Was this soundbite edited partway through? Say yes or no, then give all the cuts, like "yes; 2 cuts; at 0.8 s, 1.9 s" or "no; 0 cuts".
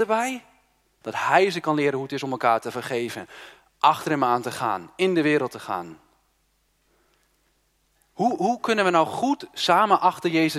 yes; 1 cut; at 1.0 s